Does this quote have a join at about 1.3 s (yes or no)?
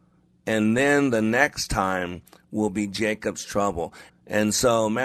no